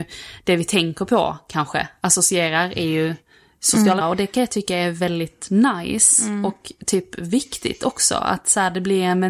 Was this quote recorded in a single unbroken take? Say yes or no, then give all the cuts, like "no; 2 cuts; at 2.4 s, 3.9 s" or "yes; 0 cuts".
no; 1 cut; at 4.0 s